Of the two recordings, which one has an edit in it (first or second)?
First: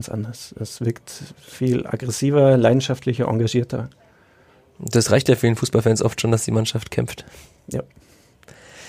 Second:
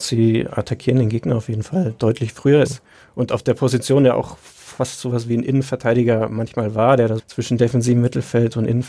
second